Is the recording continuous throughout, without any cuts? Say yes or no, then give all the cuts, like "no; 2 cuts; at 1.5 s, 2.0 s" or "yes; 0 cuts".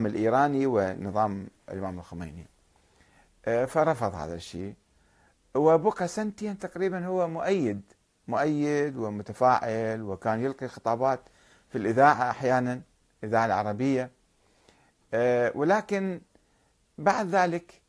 yes; 0 cuts